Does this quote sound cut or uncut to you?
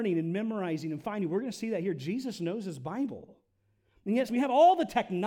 cut